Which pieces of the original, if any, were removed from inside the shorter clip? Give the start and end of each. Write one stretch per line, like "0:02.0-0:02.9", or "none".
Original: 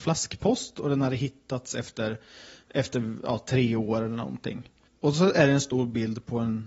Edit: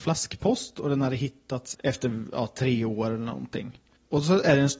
0:01.7-0:02.6

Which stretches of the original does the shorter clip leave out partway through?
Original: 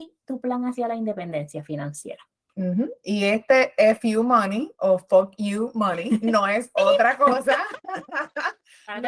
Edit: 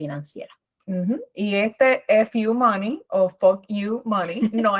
none

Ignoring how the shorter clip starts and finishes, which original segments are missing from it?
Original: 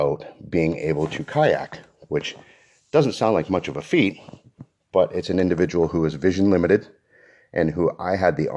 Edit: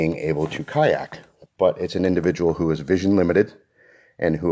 0:02.1-0:04.8

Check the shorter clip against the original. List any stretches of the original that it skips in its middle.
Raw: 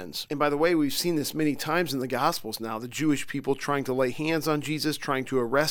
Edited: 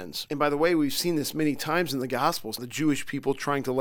0:02.6-0:02.8

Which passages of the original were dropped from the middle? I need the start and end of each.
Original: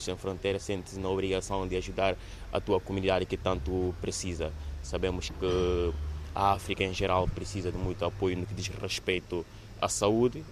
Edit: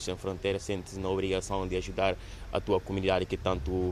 none

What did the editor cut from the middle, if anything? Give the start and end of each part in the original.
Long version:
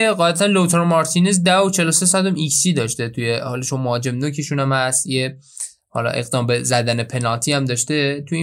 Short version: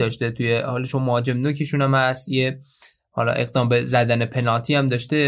none

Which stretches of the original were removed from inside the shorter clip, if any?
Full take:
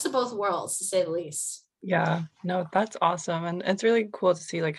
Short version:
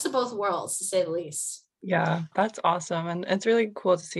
0:02.3-0:02.7

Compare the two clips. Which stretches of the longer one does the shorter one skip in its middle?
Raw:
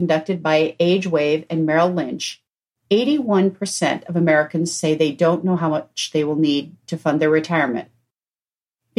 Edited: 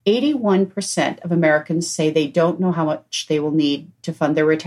none

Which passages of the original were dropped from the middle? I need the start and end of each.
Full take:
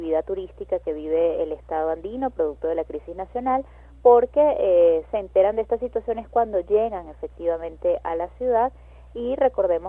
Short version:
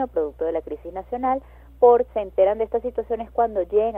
0:04.3-0:05.1

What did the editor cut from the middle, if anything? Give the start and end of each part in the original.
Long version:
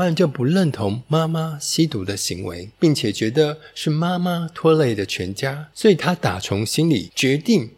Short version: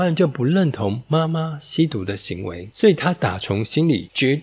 0:02.7-0:05.7

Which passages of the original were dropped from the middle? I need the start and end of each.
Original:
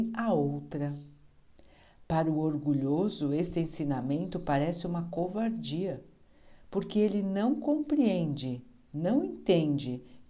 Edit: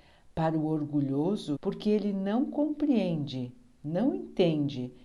0:03.3-0:06.6

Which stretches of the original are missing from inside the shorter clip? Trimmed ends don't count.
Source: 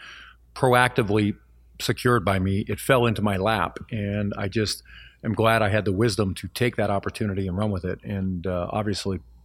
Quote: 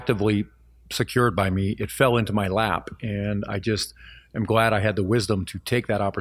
none

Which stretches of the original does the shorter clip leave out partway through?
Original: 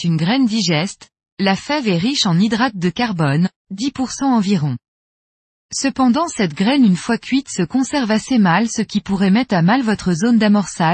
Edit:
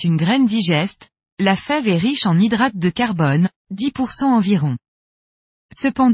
none

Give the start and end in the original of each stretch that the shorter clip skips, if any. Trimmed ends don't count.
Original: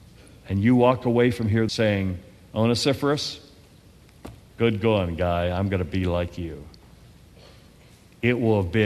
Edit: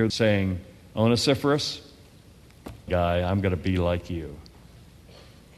0:04.5-0:05.2

